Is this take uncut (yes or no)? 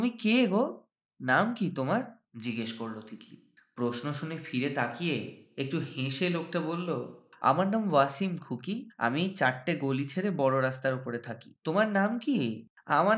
yes